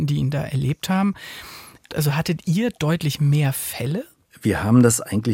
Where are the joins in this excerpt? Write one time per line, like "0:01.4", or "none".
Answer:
0:01.9